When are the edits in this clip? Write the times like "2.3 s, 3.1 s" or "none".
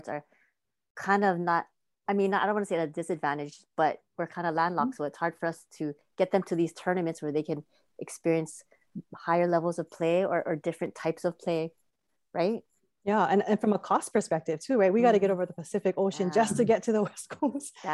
none